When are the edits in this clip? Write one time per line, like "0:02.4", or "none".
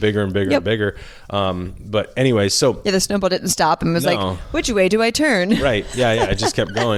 none